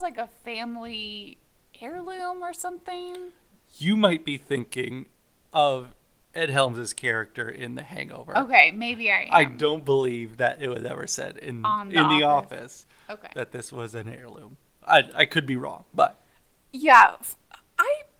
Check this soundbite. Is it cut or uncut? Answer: uncut